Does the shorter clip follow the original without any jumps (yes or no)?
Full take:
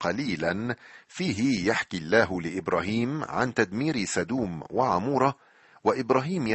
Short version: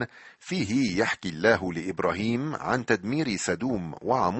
yes